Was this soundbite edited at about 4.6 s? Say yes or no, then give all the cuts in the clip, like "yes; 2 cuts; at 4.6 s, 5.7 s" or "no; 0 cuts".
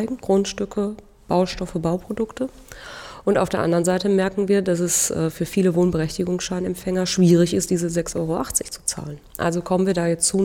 no; 0 cuts